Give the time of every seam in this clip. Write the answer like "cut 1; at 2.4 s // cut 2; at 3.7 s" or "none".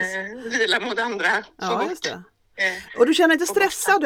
none

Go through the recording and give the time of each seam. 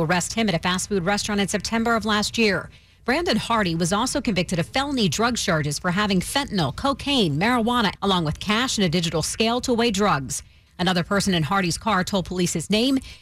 cut 1; at 8.0 s // cut 2; at 10.7 s

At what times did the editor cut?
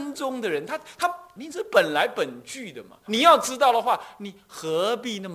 cut 1; at 1.4 s // cut 2; at 3.1 s

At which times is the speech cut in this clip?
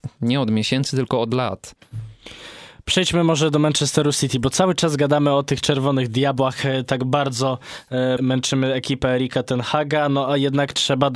cut 1; at 8.2 s

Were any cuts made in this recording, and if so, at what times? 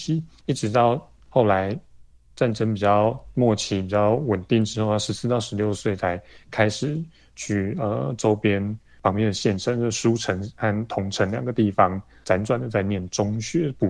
none

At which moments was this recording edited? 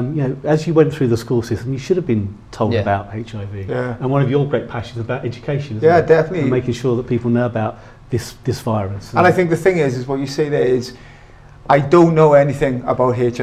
none

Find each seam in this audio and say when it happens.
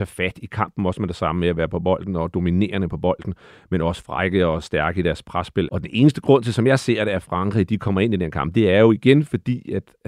cut 1; at 5.7 s

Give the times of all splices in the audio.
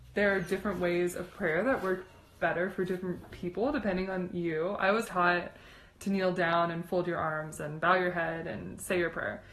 cut 1; at 5.0 s

